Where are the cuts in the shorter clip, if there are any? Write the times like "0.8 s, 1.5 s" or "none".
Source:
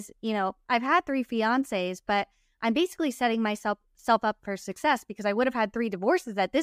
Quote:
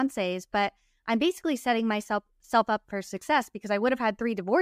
none